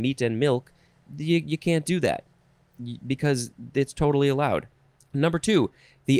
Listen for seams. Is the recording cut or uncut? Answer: cut